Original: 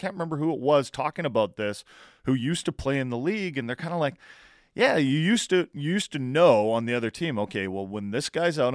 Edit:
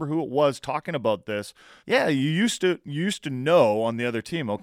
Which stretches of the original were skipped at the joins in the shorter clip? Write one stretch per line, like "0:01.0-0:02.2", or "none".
0:02.1-0:04.7